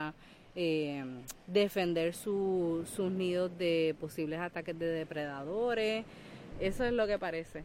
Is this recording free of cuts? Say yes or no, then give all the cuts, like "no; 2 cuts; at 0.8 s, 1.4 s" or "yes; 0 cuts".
no; 1 cut; at 6.5 s